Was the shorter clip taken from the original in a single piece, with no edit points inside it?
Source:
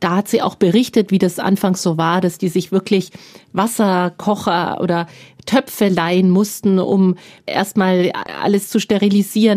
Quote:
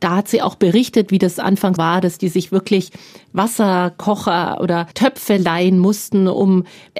no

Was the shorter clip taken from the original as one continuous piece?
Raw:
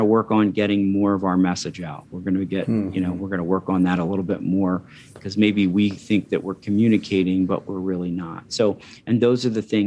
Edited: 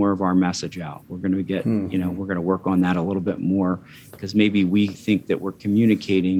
yes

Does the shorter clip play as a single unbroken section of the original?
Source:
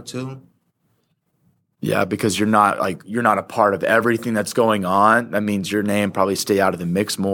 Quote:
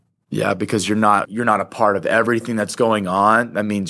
no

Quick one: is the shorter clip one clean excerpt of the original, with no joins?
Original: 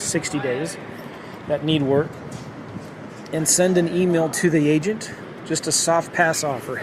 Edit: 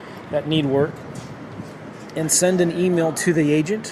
yes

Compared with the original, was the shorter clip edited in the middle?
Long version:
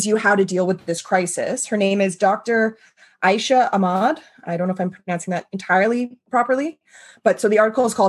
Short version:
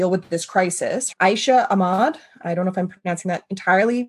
yes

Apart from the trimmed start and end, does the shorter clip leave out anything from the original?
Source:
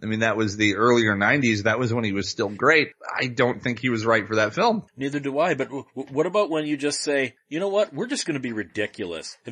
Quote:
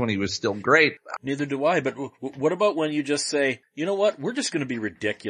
yes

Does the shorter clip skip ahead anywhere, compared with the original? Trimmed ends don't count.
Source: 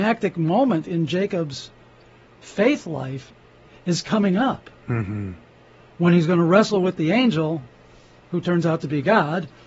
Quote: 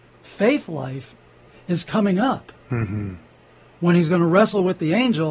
no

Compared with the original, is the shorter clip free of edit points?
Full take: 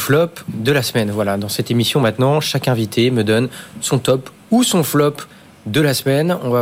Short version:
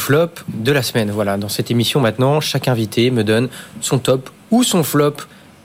yes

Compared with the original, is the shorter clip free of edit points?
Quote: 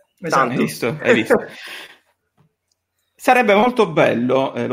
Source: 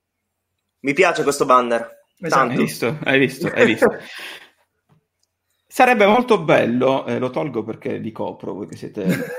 no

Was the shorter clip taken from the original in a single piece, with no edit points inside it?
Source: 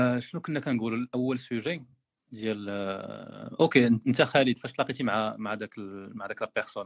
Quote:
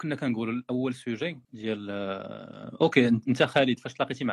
no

